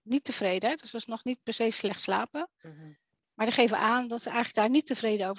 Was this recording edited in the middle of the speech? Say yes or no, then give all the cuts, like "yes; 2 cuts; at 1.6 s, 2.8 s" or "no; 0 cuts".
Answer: no; 0 cuts